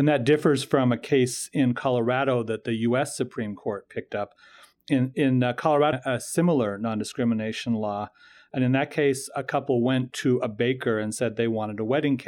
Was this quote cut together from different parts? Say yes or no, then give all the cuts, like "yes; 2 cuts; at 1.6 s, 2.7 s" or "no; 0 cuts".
yes; 1 cut; at 5.9 s